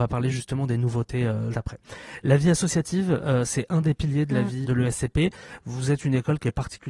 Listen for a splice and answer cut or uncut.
cut